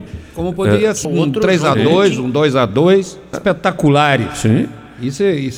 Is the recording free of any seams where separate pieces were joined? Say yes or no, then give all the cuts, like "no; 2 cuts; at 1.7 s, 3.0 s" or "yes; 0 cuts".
no; 2 cuts; at 1.1 s, 3.3 s